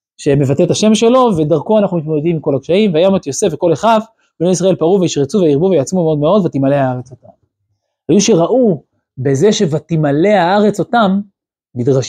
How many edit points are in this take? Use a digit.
0